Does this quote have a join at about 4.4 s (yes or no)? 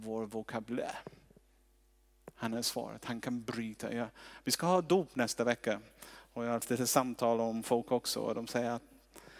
no